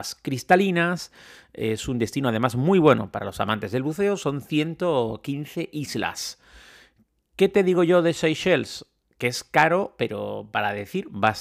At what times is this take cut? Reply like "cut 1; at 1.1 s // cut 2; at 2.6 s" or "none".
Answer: none